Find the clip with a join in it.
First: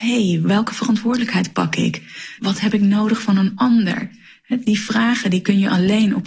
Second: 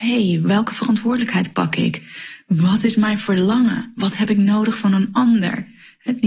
first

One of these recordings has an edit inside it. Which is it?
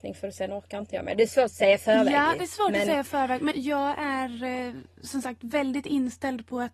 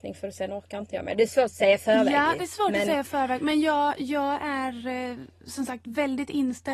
first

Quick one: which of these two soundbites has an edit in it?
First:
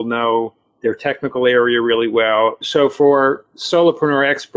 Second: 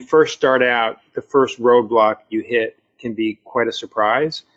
first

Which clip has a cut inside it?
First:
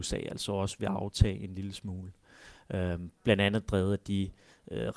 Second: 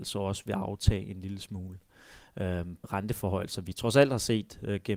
second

